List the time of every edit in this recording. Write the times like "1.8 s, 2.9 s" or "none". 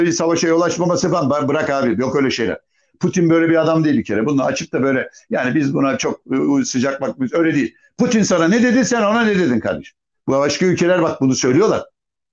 10.2 s